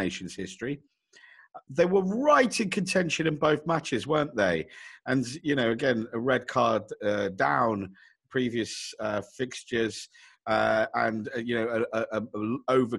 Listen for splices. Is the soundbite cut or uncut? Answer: uncut